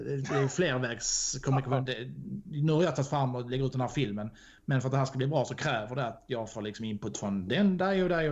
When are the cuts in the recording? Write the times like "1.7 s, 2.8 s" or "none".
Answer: 1.9 s